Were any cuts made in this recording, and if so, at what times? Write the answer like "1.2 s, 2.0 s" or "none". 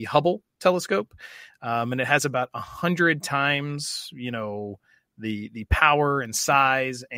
none